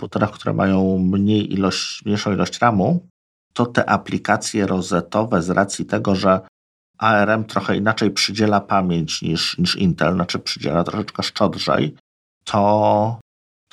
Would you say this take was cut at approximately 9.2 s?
no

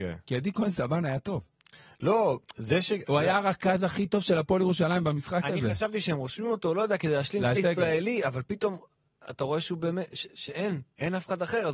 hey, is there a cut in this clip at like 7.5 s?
yes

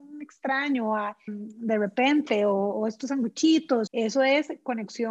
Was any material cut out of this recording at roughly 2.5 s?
no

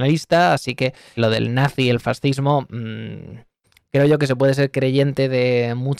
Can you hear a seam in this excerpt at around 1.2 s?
yes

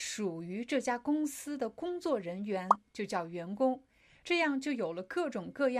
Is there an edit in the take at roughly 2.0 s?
no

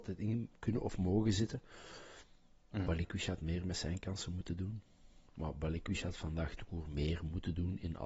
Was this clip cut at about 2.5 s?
no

